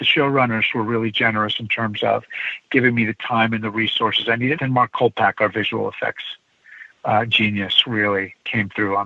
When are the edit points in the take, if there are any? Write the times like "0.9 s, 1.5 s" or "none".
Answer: 4.6 s